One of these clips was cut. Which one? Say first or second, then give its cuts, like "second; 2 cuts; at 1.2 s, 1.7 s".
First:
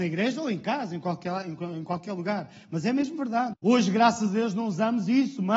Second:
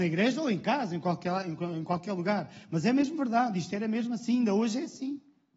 first; 1 cut; at 3.5 s